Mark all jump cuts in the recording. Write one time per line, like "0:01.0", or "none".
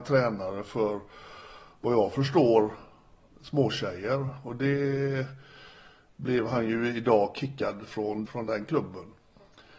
0:08.3